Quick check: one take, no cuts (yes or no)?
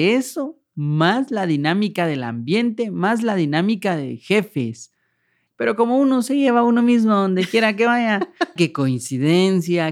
no